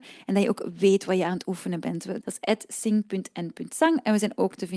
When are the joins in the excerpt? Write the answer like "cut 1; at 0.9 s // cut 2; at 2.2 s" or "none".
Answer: cut 1; at 2.2 s